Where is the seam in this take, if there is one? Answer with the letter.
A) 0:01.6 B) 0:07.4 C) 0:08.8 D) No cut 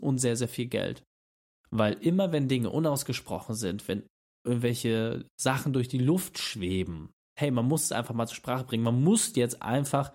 B